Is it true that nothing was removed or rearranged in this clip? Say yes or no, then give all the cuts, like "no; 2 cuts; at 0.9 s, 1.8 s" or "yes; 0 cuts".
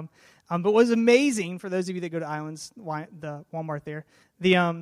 yes; 0 cuts